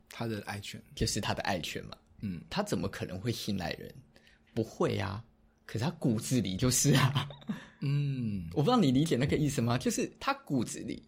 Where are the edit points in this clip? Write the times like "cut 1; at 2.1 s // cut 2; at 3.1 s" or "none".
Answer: cut 1; at 2.5 s